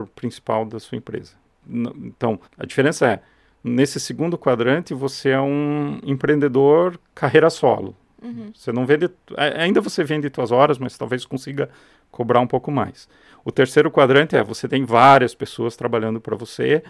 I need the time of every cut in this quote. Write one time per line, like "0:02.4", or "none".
0:02.5